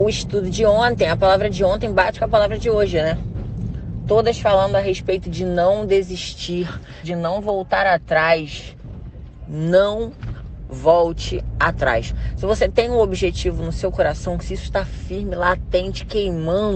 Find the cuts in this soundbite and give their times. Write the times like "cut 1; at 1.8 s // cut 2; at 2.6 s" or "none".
cut 1; at 7.0 s